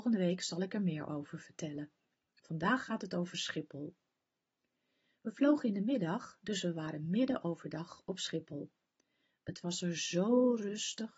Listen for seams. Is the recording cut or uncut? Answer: uncut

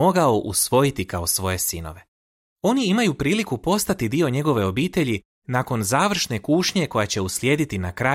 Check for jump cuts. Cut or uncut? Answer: cut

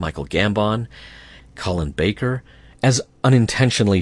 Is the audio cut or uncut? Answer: cut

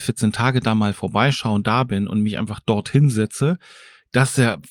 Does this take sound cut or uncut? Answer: uncut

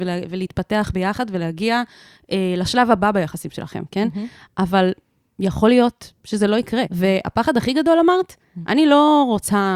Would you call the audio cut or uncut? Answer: cut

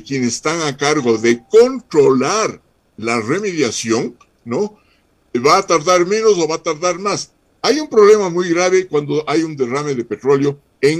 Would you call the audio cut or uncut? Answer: uncut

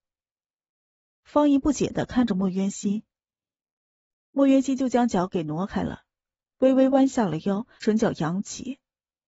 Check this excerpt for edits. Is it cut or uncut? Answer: cut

